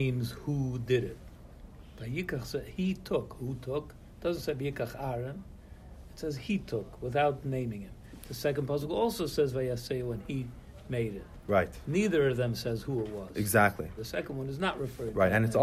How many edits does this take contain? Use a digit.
1